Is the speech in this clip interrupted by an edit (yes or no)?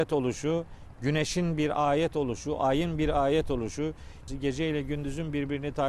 yes